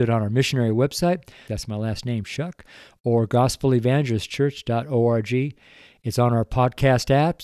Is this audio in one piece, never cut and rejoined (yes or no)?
no